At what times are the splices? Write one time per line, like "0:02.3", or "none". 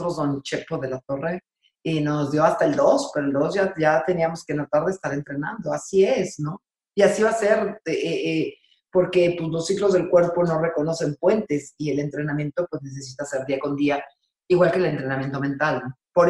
none